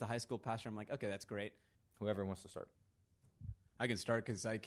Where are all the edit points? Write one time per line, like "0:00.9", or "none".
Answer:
0:01.7